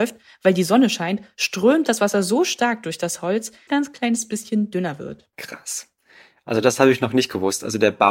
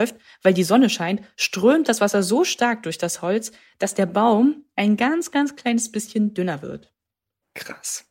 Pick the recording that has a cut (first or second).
first